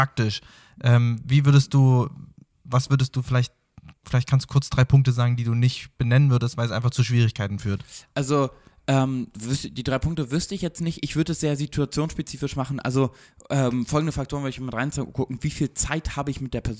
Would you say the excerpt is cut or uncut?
uncut